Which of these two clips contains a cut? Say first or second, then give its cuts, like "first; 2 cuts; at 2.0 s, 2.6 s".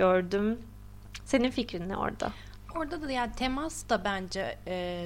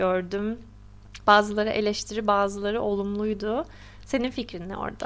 first; 1 cut; at 1.3 s